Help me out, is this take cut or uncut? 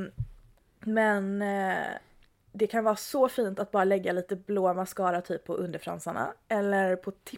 uncut